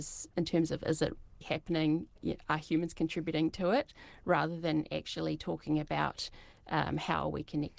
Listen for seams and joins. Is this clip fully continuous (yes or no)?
no